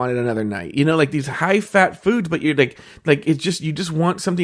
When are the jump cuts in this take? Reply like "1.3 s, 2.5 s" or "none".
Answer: none